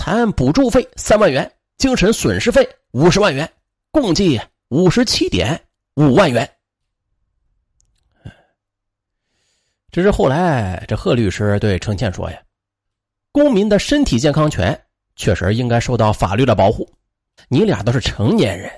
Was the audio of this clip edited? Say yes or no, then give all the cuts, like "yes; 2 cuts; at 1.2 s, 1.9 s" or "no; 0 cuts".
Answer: yes; 1 cut; at 17.4 s